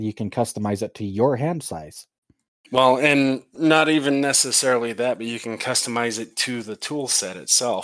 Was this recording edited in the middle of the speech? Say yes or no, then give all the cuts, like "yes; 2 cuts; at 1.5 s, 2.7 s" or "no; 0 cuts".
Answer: no; 0 cuts